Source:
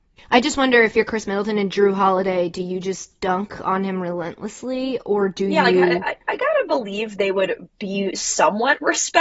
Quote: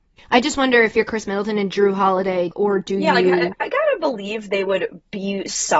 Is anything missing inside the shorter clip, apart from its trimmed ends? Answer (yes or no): yes